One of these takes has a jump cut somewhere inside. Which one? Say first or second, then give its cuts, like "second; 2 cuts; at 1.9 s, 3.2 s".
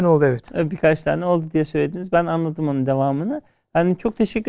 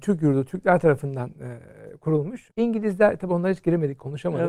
second; 1 cut; at 2.5 s